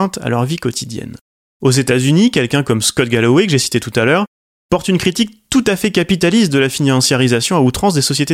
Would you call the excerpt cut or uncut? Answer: cut